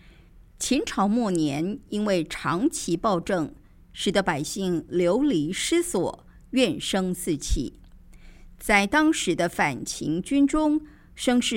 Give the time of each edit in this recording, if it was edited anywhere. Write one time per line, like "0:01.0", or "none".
none